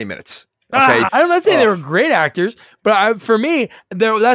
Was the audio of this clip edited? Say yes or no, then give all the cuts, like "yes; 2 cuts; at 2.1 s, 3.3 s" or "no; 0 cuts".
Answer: yes; 1 cut; at 1.1 s